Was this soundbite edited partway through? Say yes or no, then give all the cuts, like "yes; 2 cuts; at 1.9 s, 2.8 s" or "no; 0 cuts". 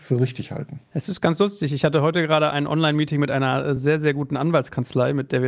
no; 0 cuts